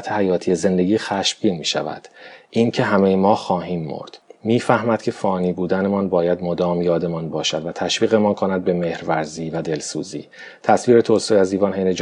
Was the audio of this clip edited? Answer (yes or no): no